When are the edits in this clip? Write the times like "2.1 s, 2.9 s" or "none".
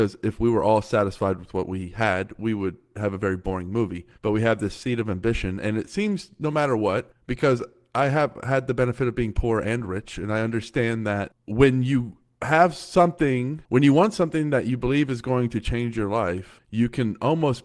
4.1 s